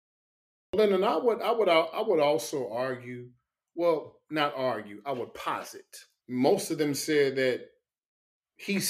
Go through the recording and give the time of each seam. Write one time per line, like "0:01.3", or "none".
0:06.2